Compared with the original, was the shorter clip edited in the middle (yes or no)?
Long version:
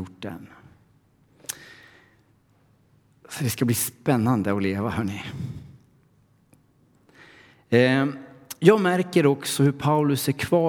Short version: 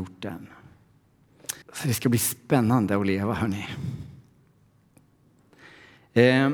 yes